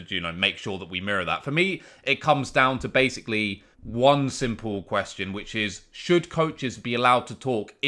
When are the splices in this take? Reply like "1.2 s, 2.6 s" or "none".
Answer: 3.7 s